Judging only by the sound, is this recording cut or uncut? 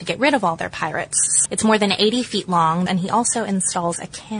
cut